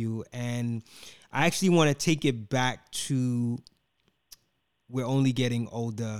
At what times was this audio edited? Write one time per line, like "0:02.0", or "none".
none